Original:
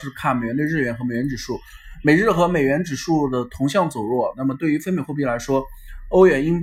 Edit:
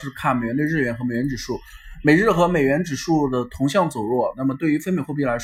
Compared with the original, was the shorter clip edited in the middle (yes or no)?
no